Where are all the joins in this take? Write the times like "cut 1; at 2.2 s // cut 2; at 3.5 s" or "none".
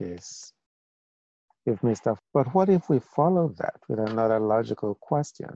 cut 1; at 2.2 s